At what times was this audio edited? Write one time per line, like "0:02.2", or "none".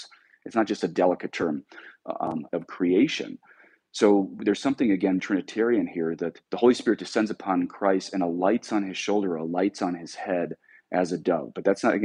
0:02.5
0:05.2
0:06.4